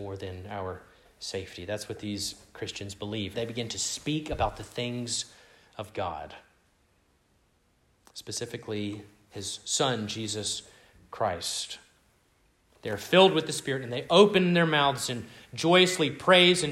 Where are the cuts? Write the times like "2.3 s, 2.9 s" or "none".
3.3 s